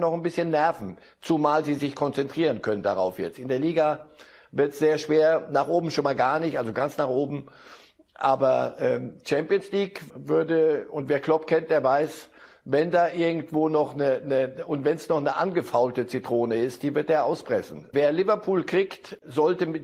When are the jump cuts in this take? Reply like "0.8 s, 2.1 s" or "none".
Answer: 10.1 s, 17.9 s

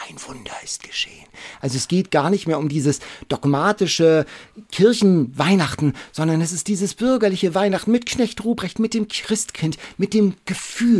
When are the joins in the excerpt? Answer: none

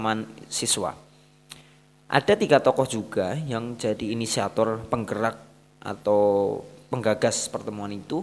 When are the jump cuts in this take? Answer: none

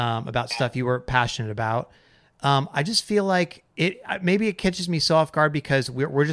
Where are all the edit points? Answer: 3.7 s

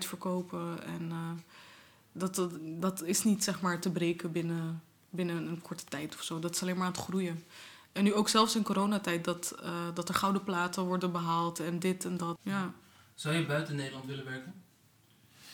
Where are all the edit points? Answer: 12.4 s

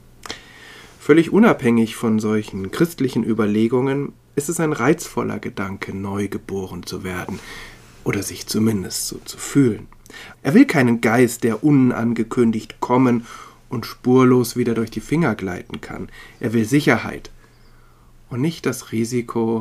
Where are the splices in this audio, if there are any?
10.3 s

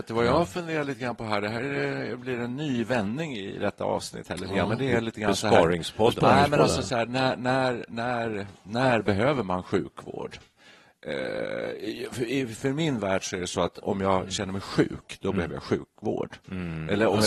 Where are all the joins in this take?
none

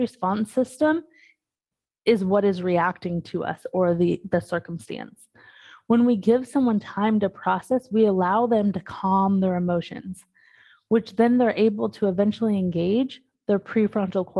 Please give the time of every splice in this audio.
none

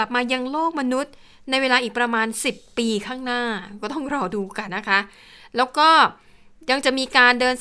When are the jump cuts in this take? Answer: 4.7 s

